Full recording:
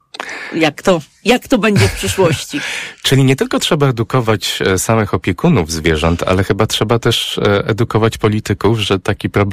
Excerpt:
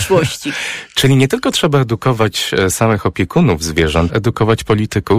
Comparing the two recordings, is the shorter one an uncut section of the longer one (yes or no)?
no